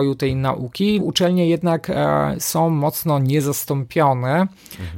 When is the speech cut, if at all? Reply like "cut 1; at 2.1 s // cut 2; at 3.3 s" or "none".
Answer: cut 1; at 1.0 s

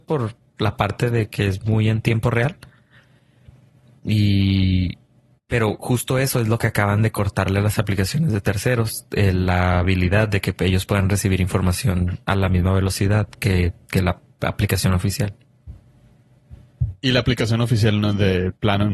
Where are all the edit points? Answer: cut 1; at 13.8 s

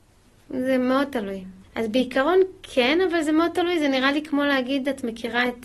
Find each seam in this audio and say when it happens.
cut 1; at 1.6 s

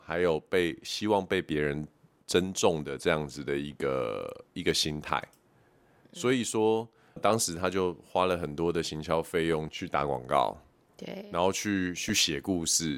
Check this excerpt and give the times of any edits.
cut 1; at 9.7 s

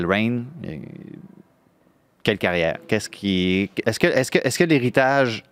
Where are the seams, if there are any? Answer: cut 1; at 3.8 s

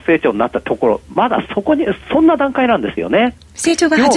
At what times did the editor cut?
none

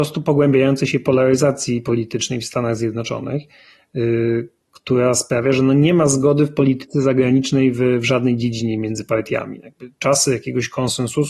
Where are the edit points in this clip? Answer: none

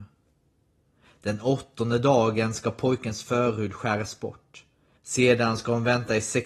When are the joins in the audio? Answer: cut 1; at 5.0 s

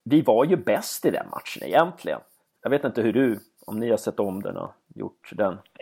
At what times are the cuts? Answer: cut 1; at 2.6 s

